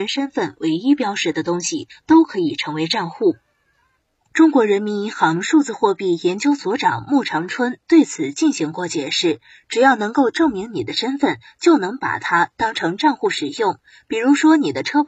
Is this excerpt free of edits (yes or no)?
no